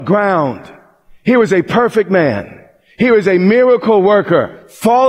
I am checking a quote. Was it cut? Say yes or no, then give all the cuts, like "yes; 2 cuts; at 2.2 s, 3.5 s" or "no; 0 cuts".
no; 0 cuts